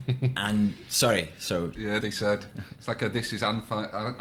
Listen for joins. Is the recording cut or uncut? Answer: cut